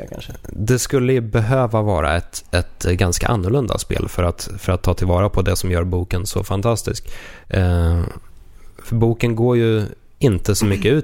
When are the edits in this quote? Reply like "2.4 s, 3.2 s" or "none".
none